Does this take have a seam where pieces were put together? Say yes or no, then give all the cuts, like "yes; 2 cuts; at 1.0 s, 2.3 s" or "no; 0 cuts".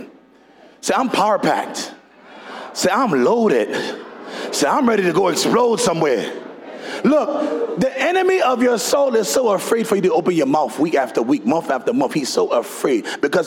no; 0 cuts